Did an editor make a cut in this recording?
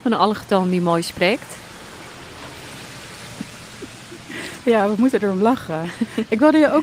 no; 0 cuts

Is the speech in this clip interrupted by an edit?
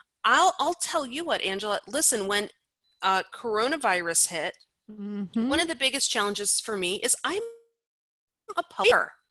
no; 0 cuts

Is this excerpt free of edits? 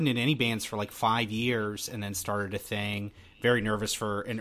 yes; 0 cuts

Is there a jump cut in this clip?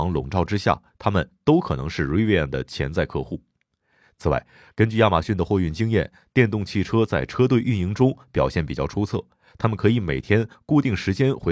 no; 0 cuts

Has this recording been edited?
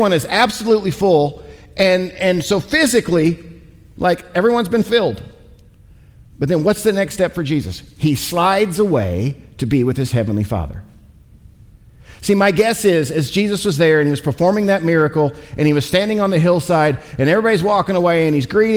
no; 0 cuts

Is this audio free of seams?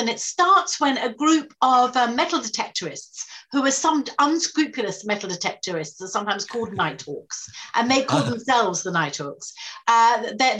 yes; 0 cuts

